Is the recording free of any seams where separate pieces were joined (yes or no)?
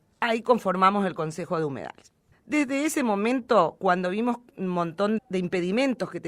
no